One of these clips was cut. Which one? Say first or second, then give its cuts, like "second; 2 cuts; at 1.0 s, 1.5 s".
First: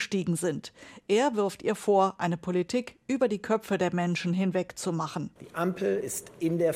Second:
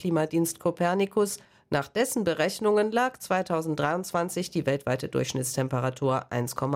first; 1 cut; at 5.4 s